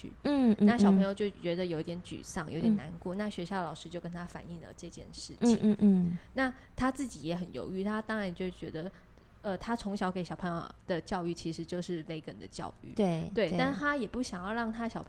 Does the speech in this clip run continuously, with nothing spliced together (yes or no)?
yes